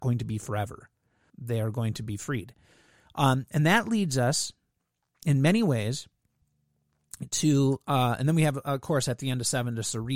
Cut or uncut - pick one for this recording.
cut